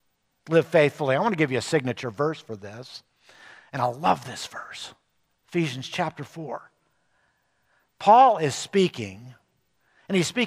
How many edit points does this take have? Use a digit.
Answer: 0